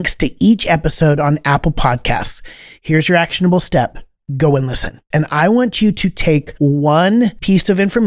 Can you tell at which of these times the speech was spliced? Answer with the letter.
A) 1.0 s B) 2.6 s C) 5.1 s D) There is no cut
C